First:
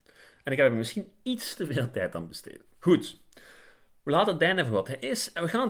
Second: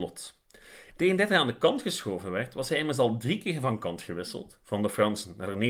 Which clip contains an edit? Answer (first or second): second